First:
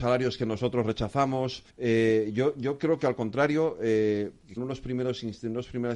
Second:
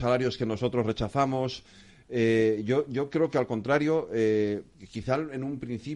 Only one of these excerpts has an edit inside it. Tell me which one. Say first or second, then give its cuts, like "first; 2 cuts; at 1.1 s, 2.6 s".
first; 2 cuts; at 1.7 s, 4.6 s